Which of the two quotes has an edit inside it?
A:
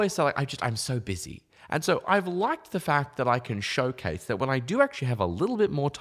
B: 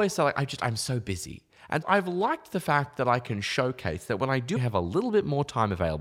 B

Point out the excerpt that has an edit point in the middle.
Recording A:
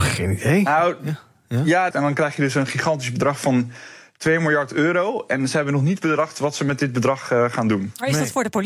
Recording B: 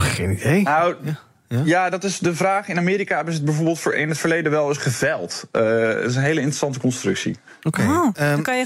A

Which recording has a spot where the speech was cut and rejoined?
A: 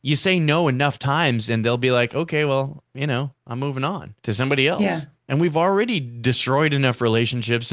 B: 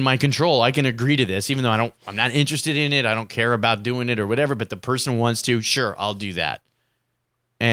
A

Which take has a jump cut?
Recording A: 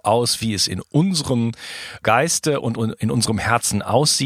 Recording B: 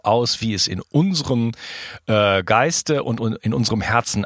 A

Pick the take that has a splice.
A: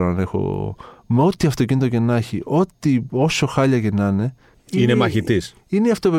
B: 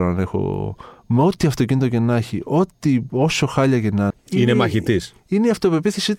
B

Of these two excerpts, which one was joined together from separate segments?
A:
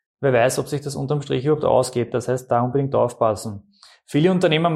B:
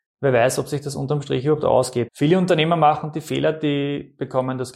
B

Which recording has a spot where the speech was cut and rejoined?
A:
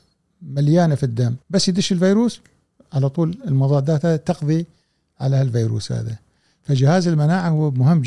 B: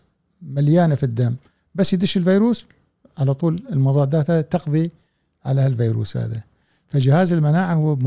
A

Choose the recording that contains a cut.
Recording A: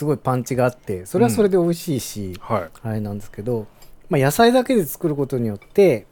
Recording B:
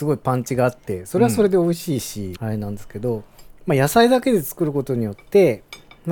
B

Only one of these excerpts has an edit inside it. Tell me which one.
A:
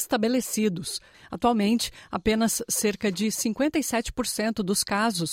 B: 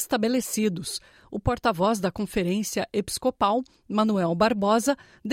A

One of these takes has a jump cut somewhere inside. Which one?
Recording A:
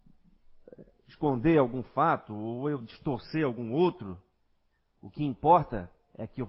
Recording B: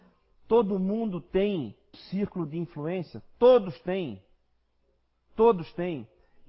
B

